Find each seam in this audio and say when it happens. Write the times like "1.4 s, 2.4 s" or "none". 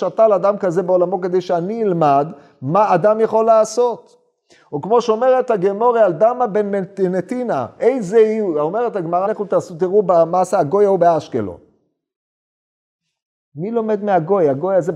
9.2 s

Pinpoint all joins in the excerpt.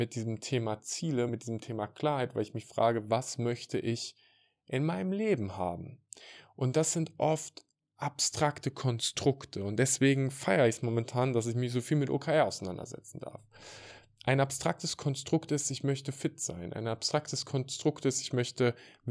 none

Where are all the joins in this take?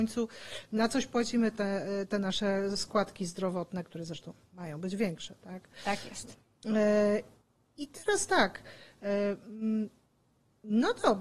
none

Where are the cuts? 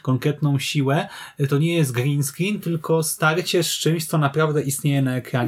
none

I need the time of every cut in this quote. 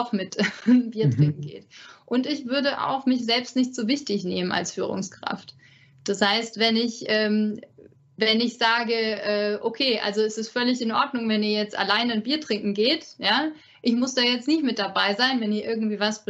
none

